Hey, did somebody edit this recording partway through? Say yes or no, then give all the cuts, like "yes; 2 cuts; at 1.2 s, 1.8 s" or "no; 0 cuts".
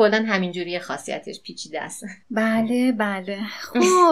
yes; 1 cut; at 2.2 s